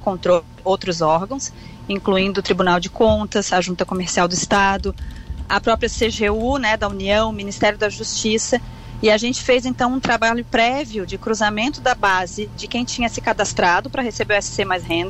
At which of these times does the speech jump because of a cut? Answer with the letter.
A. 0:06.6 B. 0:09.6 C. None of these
C